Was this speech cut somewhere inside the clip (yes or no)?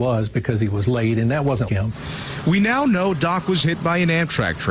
yes